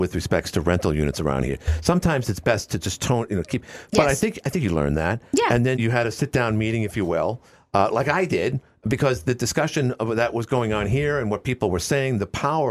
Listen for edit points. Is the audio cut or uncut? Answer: cut